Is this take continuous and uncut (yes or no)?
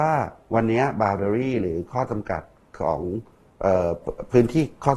yes